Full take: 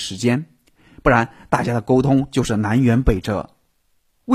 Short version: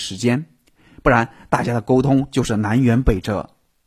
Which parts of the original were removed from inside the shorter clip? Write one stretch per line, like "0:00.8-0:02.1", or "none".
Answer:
none